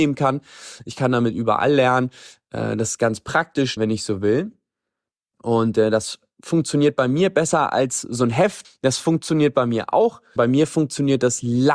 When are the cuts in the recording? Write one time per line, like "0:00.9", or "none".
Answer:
0:03.8
0:08.6
0:10.4